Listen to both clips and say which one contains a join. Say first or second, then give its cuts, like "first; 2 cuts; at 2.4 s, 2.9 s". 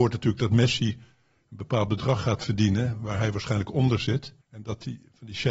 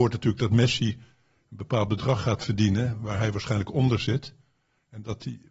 first; 1 cut; at 4.4 s